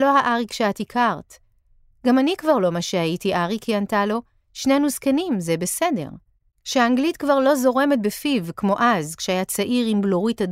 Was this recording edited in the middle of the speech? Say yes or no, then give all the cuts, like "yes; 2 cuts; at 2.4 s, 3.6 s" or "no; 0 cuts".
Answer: yes; 1 cut; at 6.5 s